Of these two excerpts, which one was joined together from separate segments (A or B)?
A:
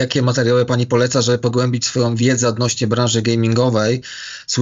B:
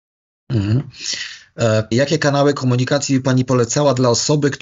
B